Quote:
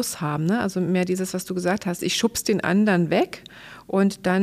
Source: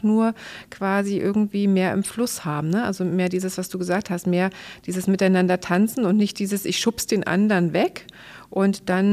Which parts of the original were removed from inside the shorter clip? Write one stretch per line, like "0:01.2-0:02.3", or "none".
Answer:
0:04.2-0:06.6